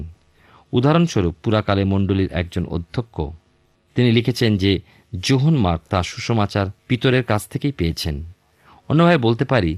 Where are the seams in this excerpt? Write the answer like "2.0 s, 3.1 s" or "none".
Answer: 6.8 s